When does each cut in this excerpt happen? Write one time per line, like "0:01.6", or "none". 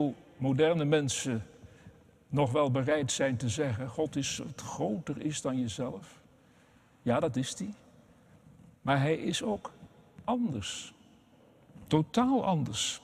none